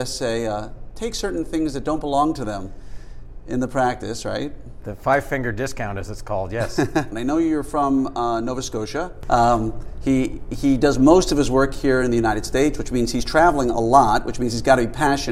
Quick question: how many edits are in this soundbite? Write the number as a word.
one